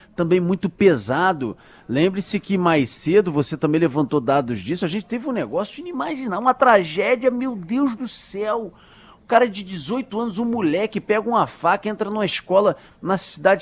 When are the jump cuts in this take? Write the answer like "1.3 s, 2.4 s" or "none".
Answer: none